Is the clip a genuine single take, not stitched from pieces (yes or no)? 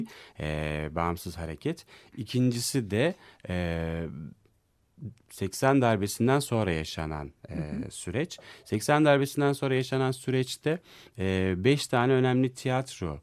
yes